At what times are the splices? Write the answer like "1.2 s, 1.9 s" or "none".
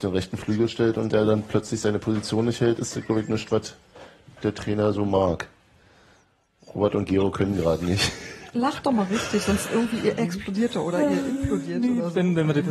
none